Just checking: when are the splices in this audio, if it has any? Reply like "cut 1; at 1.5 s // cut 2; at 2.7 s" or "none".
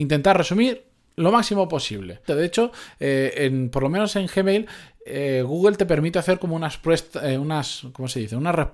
cut 1; at 2.3 s